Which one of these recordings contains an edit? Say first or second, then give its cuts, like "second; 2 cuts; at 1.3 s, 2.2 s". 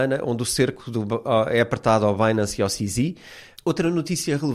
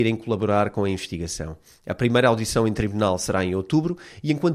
first; 1 cut; at 3.6 s